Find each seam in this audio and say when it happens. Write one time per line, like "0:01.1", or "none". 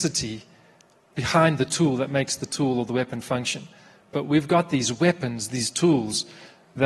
none